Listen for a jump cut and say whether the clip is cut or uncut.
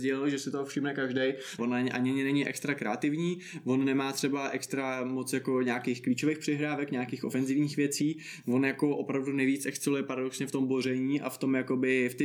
cut